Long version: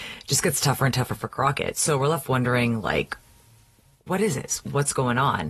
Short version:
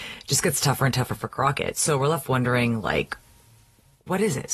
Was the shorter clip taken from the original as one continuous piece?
yes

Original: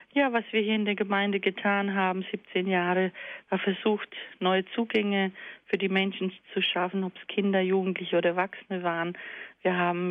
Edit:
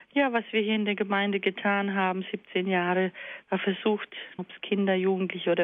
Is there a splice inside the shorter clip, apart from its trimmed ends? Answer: yes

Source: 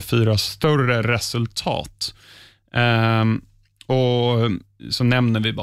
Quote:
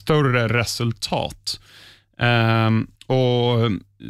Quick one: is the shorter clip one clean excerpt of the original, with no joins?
no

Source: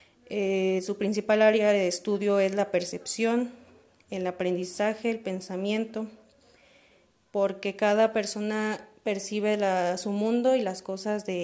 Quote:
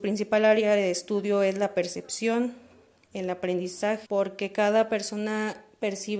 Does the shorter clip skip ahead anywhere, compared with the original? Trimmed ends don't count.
yes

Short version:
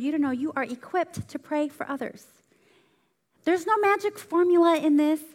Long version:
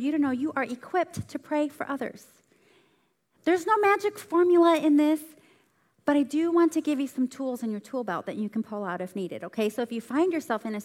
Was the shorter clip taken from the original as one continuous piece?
yes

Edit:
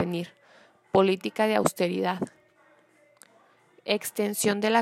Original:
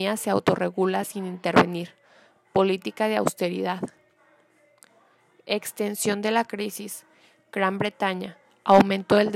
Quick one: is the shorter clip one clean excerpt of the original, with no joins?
yes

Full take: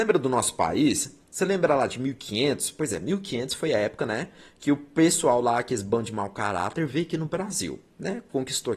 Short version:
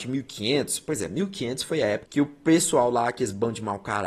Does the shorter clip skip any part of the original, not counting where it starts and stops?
yes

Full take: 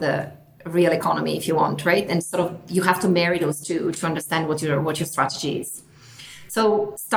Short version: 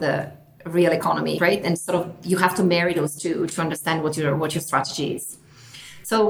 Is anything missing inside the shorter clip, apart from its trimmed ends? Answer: yes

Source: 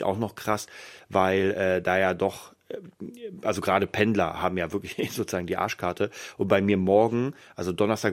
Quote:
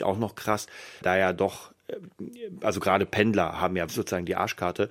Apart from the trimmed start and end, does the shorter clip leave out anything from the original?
yes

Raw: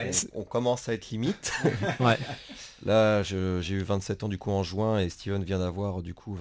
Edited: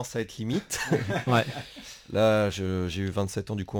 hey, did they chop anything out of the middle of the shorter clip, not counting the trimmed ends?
no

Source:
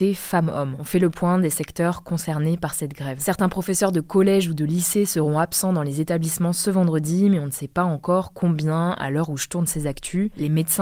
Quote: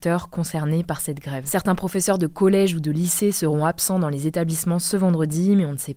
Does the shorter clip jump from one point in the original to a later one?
no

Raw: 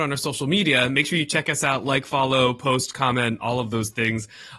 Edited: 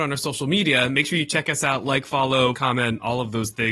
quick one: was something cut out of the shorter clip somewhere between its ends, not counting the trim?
yes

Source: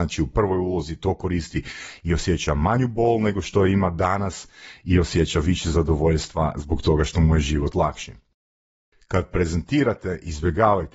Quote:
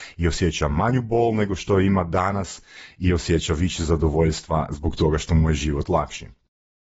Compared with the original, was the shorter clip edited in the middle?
no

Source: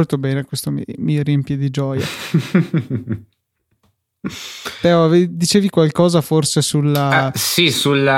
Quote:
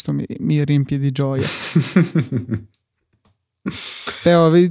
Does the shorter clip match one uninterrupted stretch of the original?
yes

